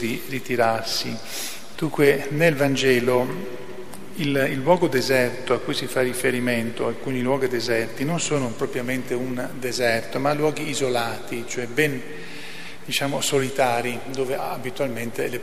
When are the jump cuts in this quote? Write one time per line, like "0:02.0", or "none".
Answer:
0:01.7